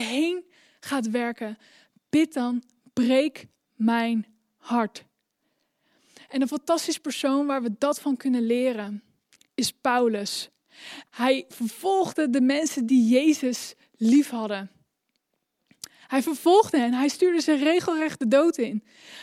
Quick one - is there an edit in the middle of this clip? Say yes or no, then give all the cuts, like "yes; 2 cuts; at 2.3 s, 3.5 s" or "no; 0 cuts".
yes; 1 cut; at 11.1 s